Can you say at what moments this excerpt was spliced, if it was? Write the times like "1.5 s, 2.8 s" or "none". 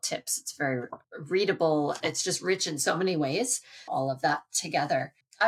3.9 s